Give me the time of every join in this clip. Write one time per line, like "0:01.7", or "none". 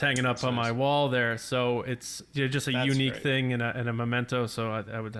none